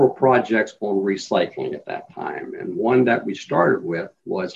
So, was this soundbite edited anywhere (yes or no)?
no